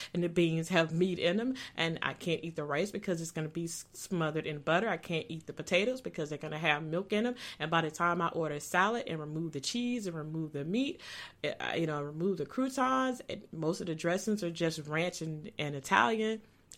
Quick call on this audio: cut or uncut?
uncut